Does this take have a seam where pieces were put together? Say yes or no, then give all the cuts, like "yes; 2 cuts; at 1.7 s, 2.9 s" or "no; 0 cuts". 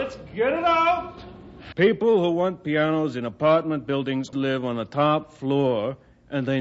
yes; 2 cuts; at 1.7 s, 4.3 s